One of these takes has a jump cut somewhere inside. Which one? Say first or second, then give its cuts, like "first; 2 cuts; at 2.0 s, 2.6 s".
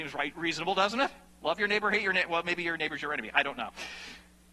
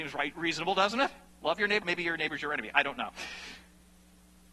second; 1 cut; at 1.8 s